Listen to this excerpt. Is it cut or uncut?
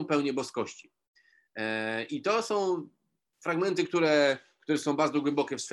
uncut